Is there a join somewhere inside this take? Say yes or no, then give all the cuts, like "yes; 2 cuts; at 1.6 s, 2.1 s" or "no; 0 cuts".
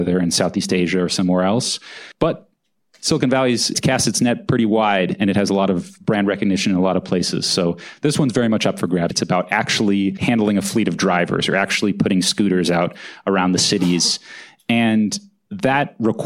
yes; 1 cut; at 9.1 s